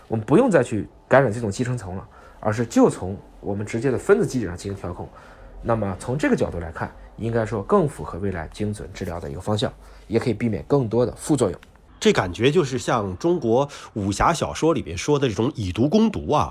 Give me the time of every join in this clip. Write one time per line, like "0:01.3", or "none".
none